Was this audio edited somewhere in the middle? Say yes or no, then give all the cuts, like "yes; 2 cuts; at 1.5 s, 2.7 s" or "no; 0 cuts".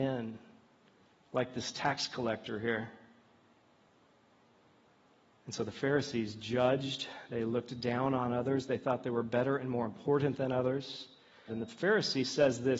yes; 1 cut; at 11.5 s